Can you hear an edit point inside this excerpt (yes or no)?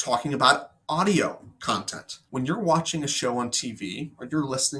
yes